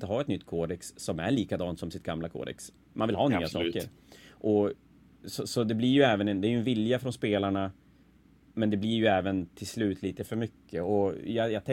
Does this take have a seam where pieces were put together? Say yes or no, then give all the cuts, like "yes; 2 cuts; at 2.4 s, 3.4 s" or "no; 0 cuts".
no; 0 cuts